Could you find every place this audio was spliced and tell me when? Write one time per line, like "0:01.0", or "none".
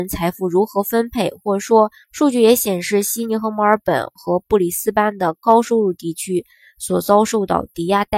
0:02.0

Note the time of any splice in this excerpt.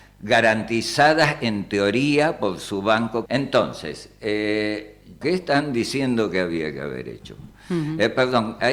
0:03.3
0:05.2

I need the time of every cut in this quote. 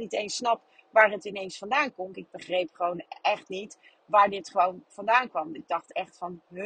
0:02.1

